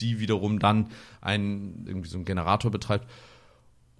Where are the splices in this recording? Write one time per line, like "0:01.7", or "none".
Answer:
0:01.9